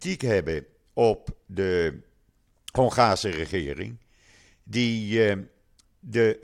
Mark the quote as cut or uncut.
uncut